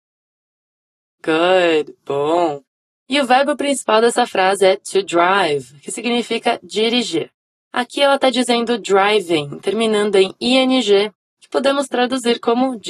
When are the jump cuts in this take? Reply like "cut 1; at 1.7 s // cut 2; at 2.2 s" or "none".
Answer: none